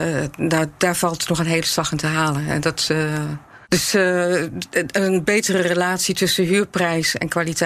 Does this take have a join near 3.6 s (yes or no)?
yes